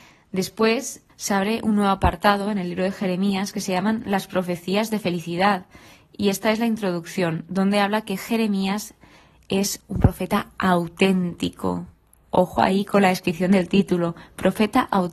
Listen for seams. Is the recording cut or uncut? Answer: cut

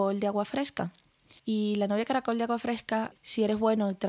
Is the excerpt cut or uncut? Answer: cut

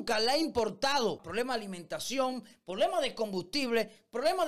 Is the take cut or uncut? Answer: cut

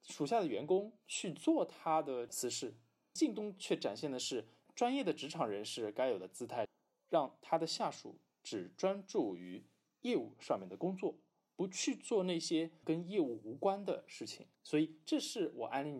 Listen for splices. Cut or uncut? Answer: cut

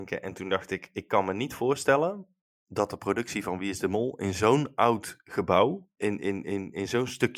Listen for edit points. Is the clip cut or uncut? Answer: cut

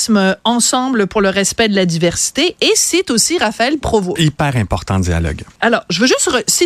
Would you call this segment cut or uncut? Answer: cut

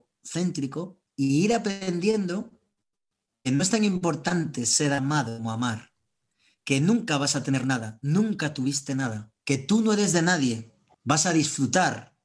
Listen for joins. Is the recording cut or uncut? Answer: cut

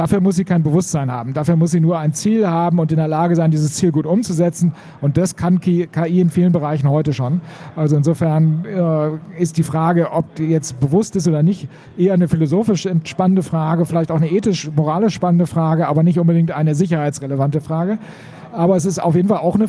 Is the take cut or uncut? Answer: uncut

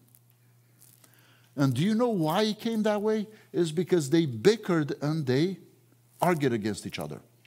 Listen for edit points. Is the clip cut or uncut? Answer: uncut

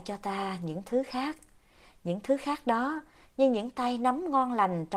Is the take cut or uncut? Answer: cut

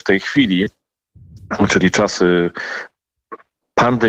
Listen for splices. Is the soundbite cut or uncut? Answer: uncut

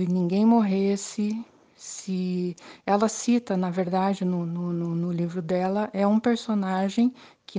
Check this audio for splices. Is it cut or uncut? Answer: uncut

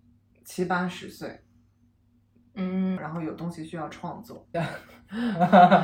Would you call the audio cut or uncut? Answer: cut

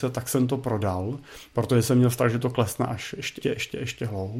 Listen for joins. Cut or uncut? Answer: cut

